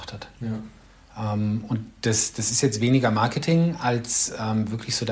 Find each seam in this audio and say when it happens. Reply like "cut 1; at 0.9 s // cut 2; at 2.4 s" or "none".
none